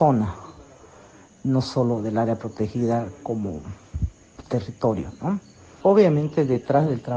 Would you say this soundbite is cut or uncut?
cut